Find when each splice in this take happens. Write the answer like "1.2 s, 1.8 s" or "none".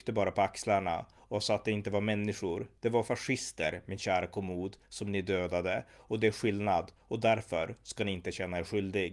none